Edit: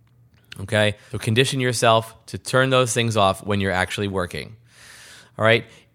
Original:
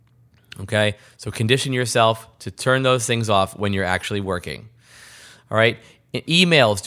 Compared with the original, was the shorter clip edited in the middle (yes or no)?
yes